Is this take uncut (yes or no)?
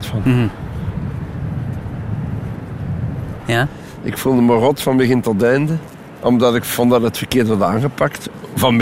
no